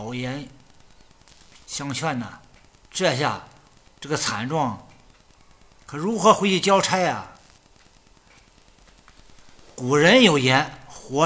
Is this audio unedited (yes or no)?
yes